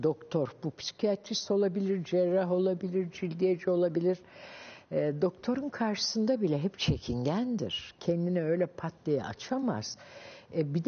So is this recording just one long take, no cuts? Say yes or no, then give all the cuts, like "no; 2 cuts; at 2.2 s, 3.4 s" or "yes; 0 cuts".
yes; 0 cuts